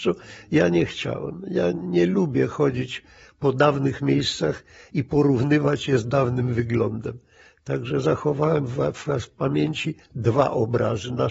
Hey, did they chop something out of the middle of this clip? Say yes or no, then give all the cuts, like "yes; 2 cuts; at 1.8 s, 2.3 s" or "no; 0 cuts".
no; 0 cuts